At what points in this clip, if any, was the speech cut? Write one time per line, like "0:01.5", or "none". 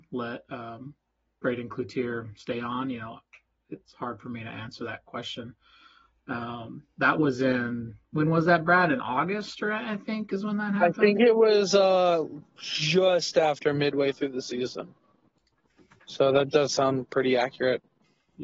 none

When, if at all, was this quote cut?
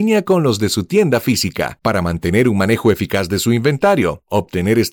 none

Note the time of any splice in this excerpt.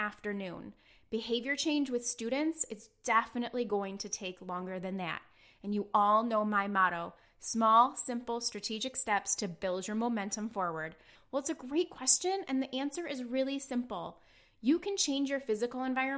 0:11.2

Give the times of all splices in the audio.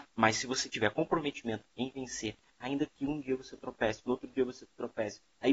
none

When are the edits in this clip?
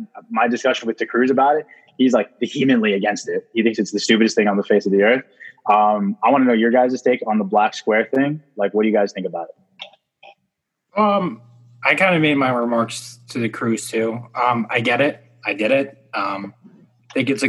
none

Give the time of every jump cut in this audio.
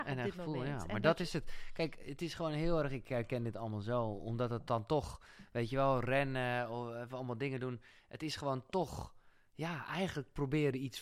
none

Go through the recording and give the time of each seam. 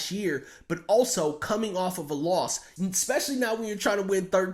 0:02.8

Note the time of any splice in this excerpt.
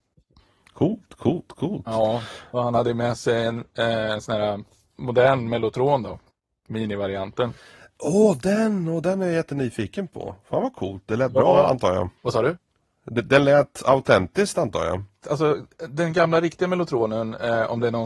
0:12.2
0:15.2

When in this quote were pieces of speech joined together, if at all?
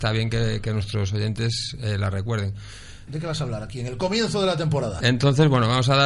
0:03.1
0:05.0

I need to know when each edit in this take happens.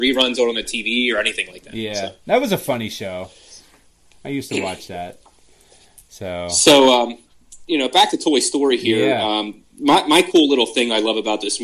none

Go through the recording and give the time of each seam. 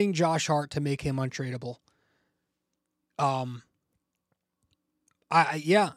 0:03.1

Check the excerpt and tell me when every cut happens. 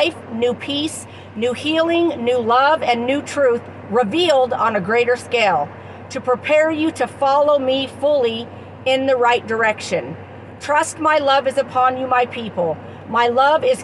none

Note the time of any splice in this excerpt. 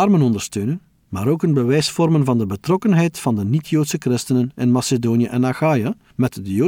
none

